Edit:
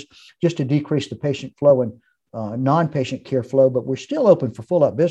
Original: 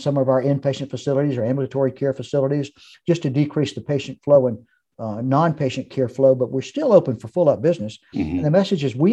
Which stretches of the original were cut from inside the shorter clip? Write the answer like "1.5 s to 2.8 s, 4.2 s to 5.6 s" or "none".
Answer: none